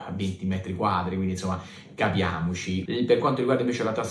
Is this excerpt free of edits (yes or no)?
no